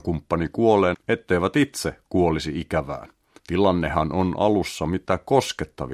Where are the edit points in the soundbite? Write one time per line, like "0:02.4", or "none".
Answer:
0:00.9
0:03.4